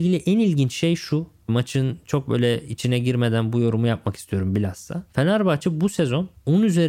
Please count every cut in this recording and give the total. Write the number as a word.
zero